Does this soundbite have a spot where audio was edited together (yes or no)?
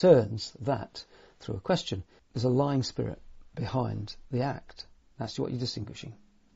yes